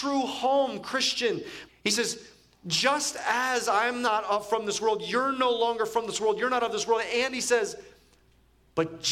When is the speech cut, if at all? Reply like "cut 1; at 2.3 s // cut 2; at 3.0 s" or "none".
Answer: cut 1; at 1.7 s